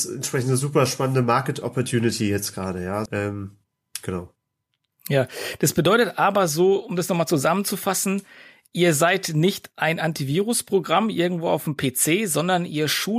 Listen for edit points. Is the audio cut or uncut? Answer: cut